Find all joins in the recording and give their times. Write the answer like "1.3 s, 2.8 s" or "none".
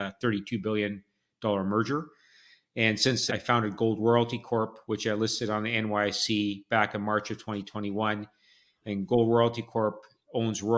3.3 s